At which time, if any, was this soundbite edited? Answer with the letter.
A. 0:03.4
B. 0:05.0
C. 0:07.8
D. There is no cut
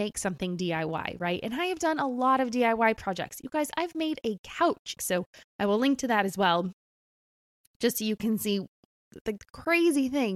B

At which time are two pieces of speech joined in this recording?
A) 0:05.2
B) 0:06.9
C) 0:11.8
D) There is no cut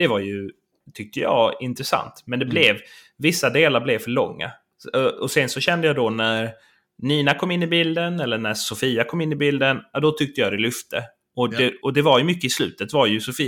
C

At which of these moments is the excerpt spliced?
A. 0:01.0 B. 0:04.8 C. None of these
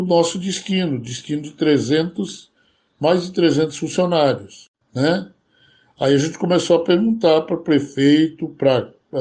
B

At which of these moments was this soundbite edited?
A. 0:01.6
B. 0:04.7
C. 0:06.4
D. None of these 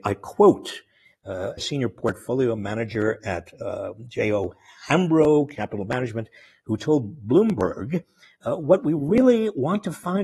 A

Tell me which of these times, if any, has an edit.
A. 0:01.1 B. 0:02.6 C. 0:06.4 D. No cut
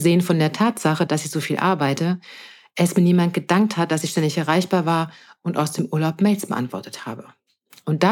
A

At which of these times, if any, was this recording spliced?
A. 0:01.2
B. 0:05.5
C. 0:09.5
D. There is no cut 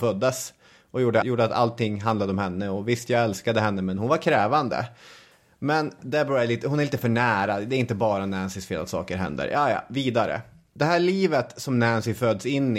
A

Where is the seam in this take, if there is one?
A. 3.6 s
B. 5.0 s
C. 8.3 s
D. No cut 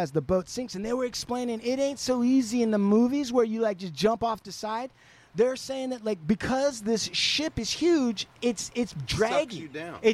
D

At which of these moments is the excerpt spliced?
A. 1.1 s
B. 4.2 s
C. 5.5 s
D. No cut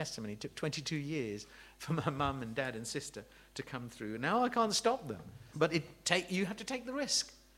C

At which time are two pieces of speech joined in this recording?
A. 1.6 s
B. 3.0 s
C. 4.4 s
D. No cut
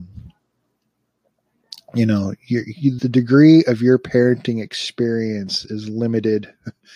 B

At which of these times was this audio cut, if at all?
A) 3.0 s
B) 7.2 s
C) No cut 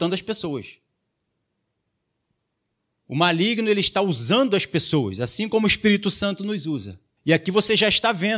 B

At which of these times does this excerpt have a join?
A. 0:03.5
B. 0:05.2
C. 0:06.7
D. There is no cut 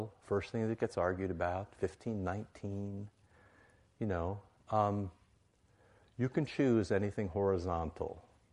D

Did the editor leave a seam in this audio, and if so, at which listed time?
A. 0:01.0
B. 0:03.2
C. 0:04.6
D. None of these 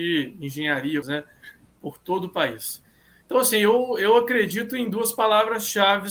A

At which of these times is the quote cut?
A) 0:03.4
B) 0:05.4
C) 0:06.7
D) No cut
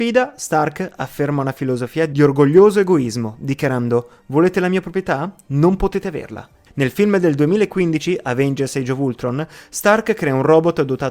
C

